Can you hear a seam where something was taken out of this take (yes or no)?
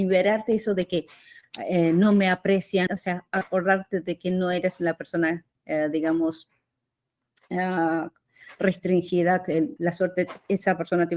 yes